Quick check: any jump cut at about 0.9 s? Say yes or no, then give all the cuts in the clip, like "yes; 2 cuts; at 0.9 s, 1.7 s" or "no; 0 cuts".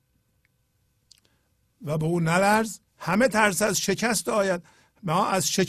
no; 1 cut; at 2.9 s